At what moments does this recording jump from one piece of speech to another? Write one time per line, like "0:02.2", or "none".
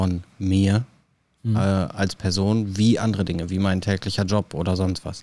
none